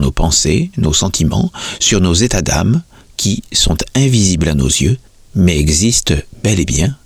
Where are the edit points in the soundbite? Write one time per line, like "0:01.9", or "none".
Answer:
none